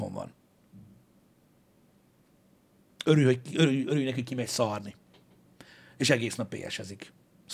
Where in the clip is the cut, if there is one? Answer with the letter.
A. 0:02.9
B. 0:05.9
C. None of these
A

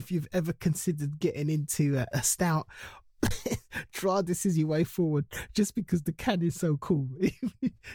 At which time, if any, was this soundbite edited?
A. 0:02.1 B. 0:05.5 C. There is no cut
A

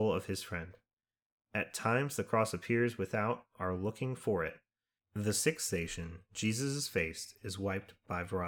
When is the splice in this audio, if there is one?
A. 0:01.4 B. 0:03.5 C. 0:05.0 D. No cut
C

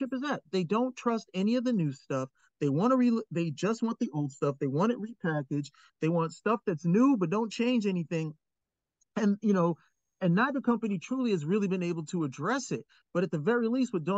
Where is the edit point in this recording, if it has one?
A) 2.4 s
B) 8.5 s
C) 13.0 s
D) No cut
D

